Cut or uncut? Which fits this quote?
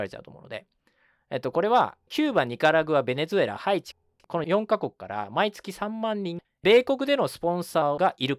cut